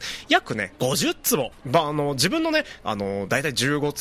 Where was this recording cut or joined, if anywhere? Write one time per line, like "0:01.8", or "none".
0:01.6
0:02.8